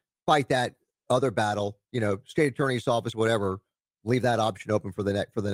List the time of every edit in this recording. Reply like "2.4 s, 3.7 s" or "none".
3.1 s